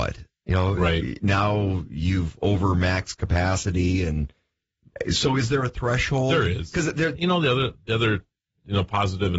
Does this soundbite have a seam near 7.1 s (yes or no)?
yes